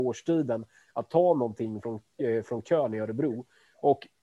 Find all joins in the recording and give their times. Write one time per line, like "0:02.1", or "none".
none